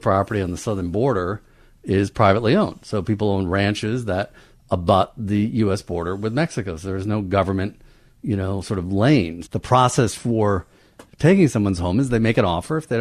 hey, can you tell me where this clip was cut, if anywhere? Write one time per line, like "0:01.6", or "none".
0:09.4